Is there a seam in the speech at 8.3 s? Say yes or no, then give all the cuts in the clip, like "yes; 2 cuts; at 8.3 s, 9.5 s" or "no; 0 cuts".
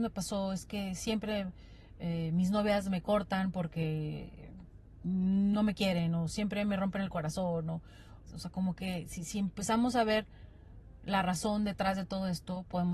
yes; 1 cut; at 8.3 s